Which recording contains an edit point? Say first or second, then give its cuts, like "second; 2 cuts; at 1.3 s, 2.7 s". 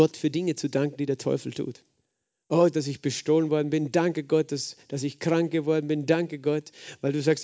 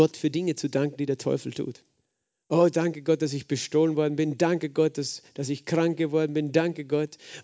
first; 1 cut; at 2.7 s